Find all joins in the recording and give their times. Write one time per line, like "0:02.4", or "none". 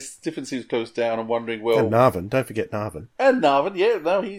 none

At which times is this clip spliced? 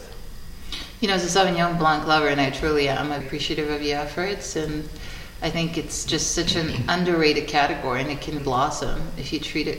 0:03.2
0:08.4

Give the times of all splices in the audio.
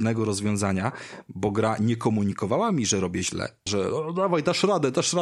0:03.7

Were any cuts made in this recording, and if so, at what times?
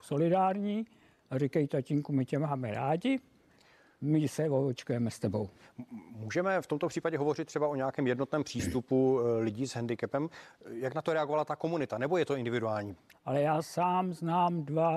0:13.1

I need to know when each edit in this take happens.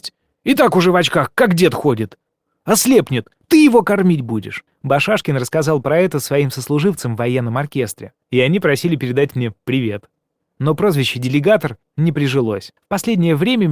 0:04.7

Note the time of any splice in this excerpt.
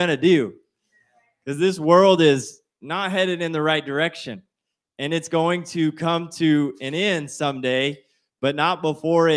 none

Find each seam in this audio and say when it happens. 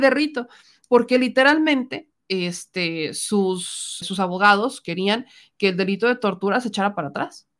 0:04.0

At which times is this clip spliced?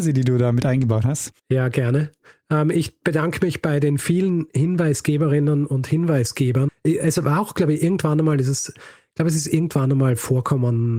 0:01.4
0:06.7

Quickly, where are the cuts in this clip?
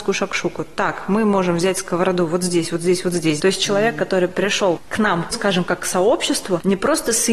0:03.4

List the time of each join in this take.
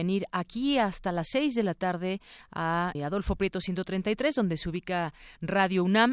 0:03.0

